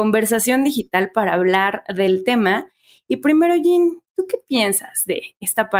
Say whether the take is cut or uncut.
uncut